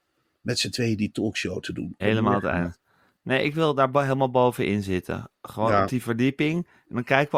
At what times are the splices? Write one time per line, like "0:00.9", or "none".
0:02.0

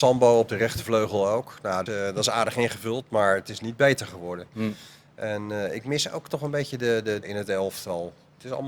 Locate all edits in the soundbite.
0:01.9
0:07.2

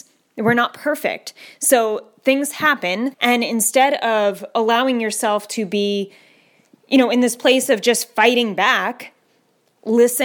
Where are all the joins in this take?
0:03.1

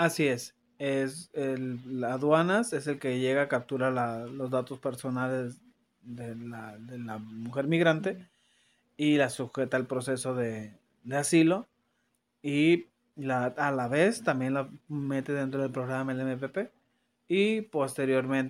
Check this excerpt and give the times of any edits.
none

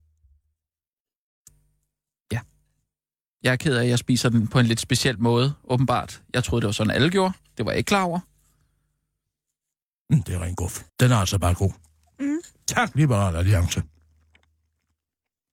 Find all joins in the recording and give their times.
0:10.9

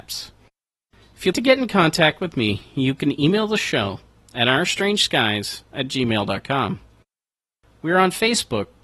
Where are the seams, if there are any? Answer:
0:01.3

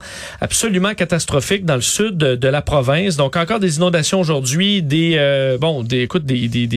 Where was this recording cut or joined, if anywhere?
none

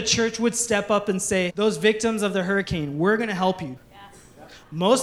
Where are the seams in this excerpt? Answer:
0:01.5
0:03.8

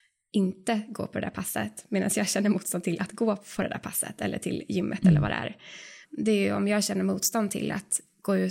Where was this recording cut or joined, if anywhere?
0:06.0

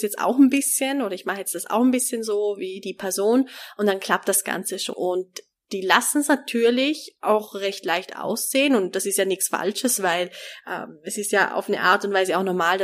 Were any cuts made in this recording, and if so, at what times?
0:04.9

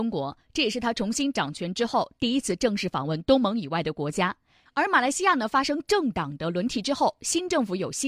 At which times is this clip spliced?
0:04.7

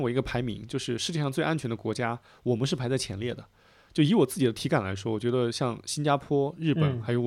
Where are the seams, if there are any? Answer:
none

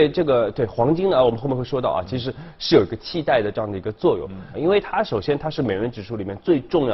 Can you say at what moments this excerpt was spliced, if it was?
0:04.5

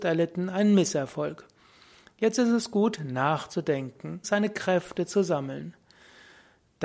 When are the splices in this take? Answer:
0:04.2

